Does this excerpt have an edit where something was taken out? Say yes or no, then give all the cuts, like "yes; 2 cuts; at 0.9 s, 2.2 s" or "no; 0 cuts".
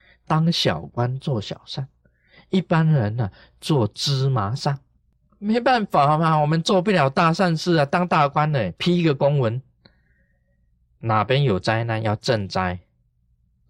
no; 0 cuts